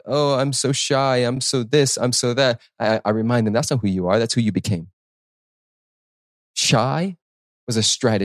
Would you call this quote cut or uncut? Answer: uncut